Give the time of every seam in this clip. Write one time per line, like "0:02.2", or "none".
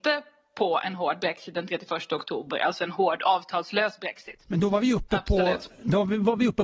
0:04.5